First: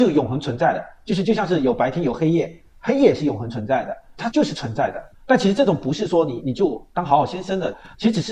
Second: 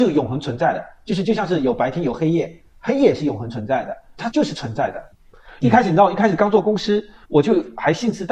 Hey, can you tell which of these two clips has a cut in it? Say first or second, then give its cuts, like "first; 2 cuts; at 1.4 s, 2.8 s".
first; 1 cut; at 5.1 s